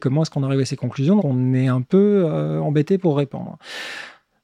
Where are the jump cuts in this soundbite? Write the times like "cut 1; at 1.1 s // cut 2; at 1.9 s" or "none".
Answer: cut 1; at 1.2 s